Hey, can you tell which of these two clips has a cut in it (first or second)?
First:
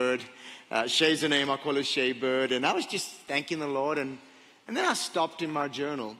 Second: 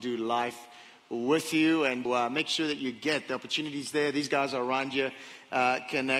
second